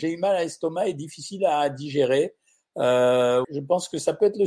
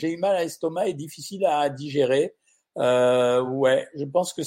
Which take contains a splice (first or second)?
first